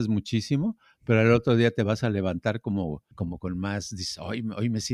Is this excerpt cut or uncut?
cut